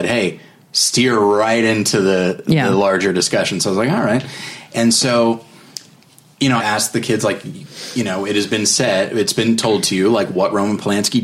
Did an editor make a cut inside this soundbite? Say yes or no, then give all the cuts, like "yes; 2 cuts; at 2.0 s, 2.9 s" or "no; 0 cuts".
yes; 1 cut; at 6.6 s